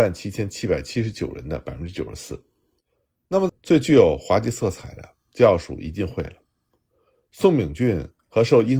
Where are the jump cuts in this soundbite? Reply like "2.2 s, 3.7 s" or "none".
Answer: 3.5 s